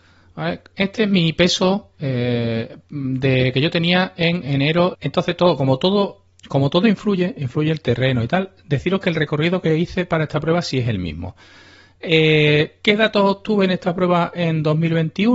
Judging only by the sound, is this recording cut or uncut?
cut